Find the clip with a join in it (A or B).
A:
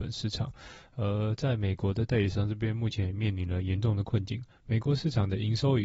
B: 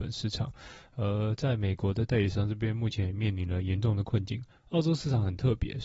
B